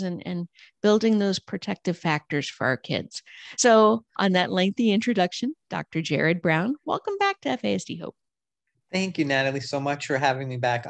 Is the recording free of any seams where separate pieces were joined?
yes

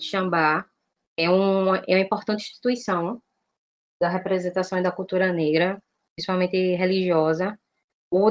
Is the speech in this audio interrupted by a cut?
no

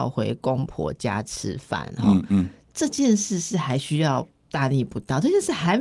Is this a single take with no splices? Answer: yes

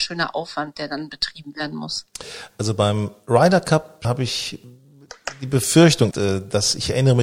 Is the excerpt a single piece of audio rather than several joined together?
no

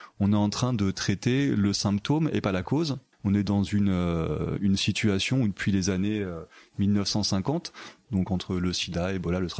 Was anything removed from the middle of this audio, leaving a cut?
yes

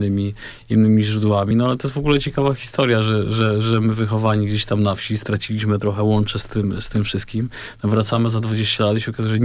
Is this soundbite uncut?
yes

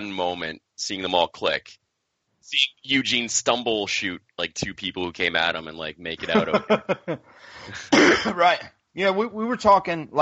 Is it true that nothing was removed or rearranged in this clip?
no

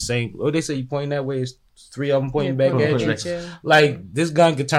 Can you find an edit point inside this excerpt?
no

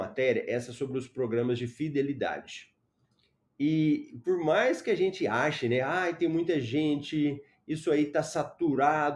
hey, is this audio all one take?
yes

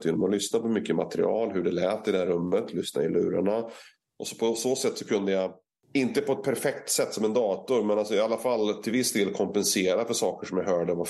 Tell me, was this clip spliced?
no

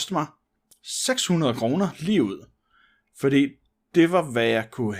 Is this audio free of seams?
yes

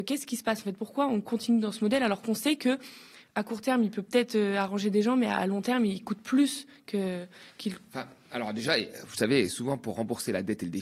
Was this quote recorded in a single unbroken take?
yes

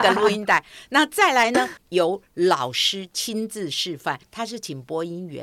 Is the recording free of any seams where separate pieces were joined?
no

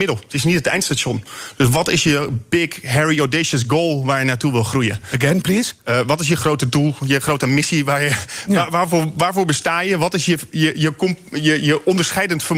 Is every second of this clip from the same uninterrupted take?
yes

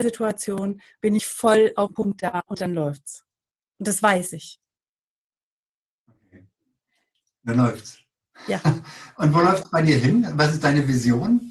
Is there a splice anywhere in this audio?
no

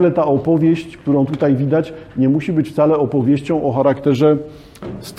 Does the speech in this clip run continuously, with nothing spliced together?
yes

